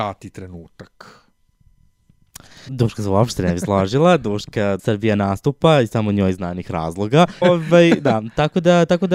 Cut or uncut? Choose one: cut